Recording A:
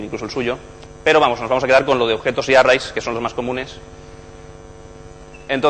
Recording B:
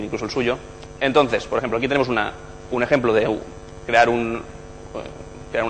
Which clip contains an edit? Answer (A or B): B